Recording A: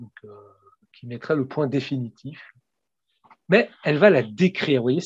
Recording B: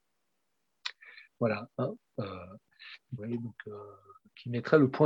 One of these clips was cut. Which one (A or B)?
B